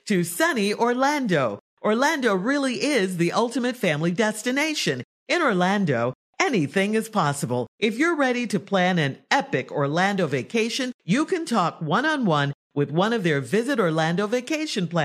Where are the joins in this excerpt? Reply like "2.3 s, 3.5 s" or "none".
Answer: 5.2 s, 7.7 s, 10.9 s